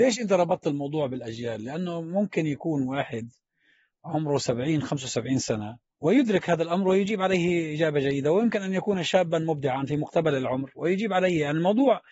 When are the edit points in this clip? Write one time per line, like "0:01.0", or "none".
none